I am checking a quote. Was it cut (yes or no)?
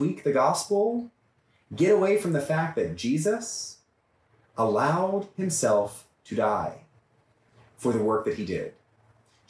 no